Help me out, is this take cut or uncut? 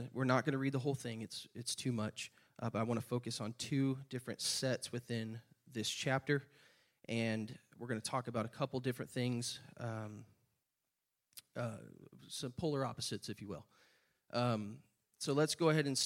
uncut